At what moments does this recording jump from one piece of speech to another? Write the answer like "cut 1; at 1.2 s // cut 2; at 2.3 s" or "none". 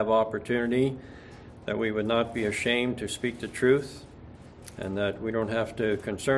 cut 1; at 4.8 s